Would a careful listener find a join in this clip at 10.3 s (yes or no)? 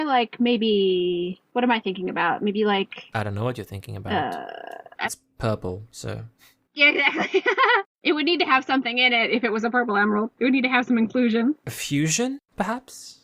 no